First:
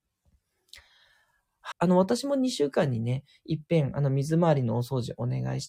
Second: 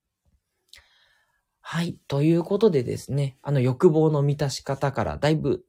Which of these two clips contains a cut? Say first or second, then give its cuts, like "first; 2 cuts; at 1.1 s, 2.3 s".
first; 1 cut; at 1.7 s